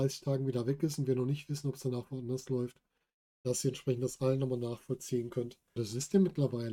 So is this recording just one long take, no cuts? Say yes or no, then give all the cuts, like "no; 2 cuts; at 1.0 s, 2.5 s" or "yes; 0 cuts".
no; 1 cut; at 5.8 s